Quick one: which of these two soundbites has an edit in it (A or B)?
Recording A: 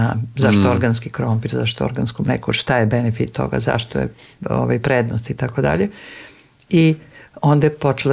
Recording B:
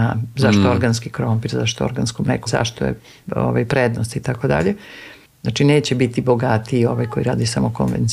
B